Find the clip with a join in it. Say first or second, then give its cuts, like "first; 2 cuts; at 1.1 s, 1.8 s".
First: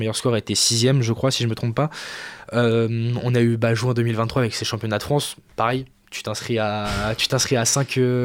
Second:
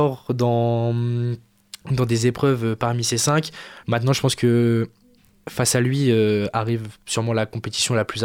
second; 1 cut; at 3.8 s